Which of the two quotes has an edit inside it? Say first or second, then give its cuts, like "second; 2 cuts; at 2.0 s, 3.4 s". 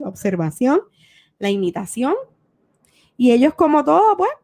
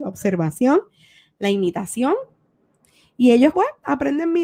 second; 1 cut; at 3.5 s